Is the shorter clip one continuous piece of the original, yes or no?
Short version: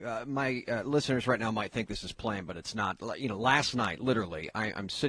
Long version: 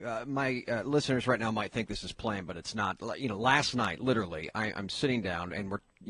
yes